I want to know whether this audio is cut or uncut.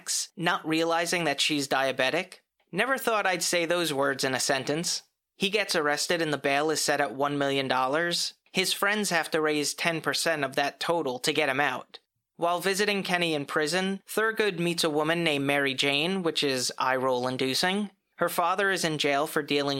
uncut